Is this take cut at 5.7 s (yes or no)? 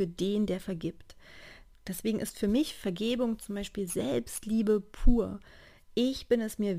no